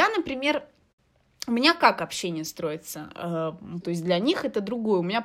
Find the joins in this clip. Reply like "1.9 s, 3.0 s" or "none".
3.8 s